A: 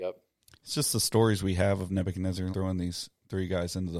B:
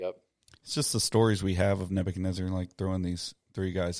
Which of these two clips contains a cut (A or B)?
A